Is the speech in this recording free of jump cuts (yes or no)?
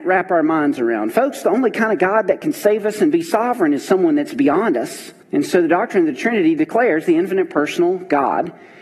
no